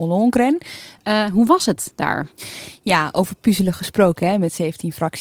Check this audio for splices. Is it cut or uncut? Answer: cut